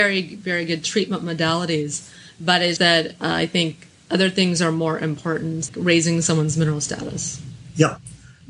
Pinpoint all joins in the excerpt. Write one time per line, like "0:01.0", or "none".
0:02.8
0:05.7